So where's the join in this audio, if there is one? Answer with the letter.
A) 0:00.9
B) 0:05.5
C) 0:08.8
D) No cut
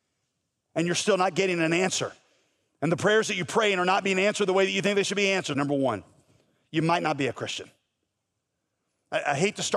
B